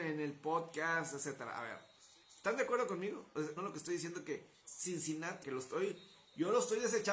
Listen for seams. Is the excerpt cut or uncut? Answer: cut